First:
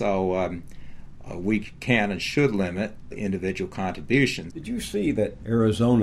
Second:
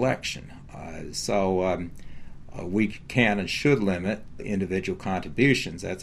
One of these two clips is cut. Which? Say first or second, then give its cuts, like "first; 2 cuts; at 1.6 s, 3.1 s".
first; 1 cut; at 4.5 s